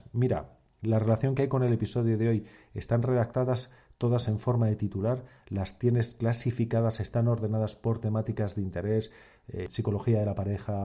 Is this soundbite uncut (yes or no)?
yes